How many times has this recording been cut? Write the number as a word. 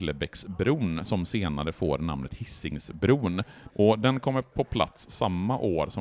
one